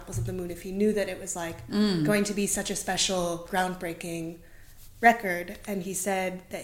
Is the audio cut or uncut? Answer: uncut